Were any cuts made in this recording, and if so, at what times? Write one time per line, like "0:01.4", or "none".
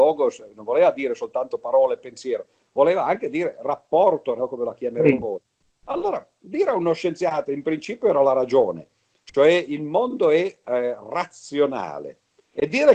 0:04.4